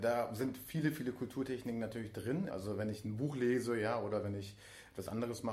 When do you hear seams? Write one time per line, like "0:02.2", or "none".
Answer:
0:02.5